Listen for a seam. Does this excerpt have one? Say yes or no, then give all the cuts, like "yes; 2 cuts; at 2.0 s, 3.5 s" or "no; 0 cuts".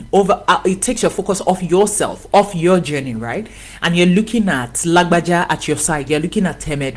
no; 0 cuts